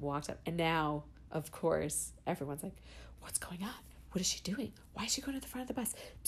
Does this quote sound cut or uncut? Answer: uncut